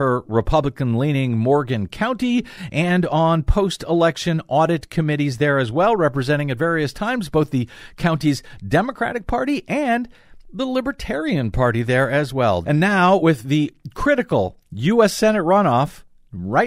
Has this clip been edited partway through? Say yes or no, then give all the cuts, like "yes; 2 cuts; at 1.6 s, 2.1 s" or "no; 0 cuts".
yes; 1 cut; at 12.6 s